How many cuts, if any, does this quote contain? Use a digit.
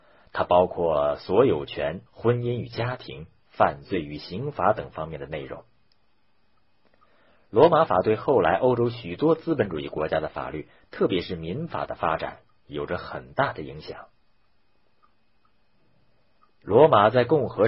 1